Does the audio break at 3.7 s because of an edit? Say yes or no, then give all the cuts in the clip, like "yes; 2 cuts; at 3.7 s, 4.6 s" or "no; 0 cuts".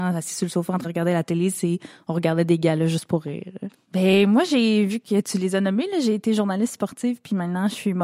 yes; 1 cut; at 3.7 s